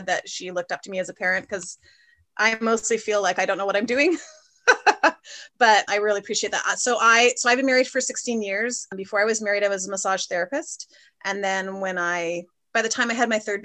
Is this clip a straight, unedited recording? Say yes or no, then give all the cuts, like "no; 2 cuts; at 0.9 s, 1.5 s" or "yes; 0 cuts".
yes; 0 cuts